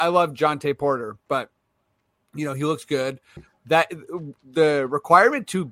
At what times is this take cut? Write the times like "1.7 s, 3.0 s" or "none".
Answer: 3.4 s